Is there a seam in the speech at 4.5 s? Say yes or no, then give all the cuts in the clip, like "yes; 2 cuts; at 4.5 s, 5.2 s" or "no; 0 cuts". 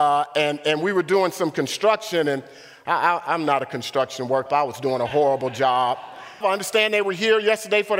yes; 2 cuts; at 4.5 s, 6.4 s